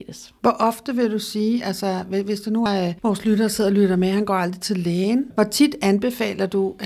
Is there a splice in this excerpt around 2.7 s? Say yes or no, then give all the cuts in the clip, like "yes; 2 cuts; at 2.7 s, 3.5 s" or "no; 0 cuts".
yes; 1 cut; at 2.7 s